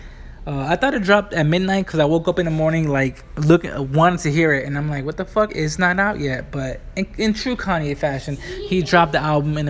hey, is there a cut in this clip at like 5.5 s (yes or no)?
yes